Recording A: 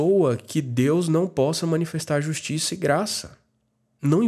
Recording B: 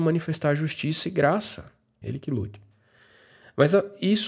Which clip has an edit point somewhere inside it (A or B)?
B